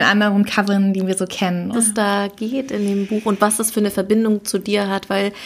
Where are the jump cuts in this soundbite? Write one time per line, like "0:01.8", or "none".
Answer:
0:01.7